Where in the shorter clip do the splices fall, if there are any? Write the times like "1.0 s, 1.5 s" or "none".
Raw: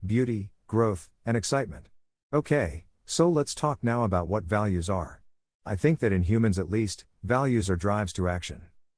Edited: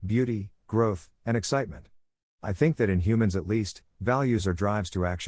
2.2 s